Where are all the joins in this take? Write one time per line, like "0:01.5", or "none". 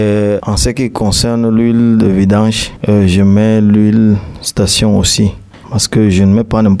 0:02.8
0:05.6

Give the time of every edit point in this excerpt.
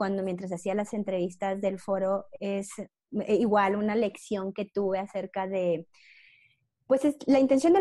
none

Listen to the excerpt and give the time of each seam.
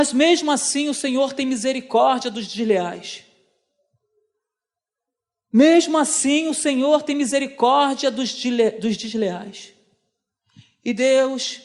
none

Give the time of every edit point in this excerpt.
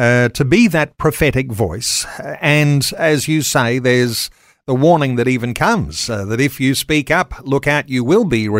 none

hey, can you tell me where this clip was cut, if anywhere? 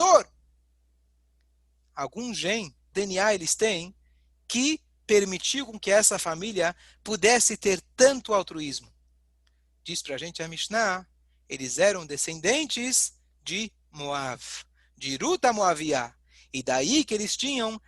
0:02.9

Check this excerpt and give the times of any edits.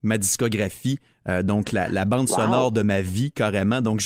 0:01.9

